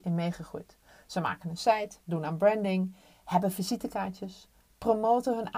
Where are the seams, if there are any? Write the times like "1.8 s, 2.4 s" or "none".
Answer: 2.0 s